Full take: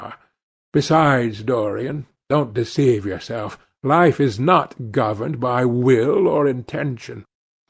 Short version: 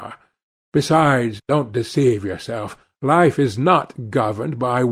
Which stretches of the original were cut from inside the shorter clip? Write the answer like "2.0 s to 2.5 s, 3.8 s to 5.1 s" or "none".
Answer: 1.4 s to 2.2 s

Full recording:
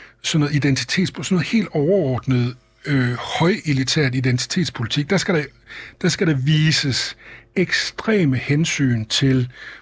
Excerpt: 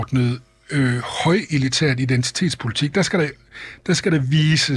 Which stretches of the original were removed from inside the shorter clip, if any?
none

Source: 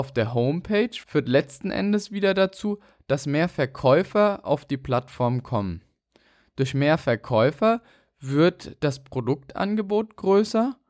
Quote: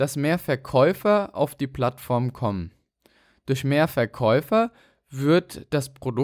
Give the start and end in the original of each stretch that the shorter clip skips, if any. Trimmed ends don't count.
none

